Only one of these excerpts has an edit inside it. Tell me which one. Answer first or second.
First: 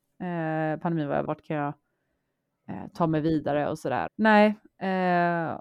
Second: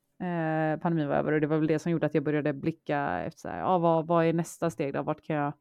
first